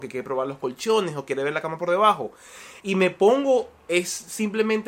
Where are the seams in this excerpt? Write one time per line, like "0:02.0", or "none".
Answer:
0:02.8